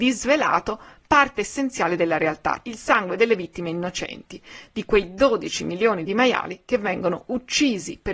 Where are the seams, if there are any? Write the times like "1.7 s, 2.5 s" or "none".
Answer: 2.6 s